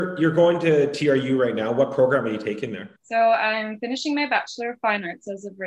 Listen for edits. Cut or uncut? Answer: cut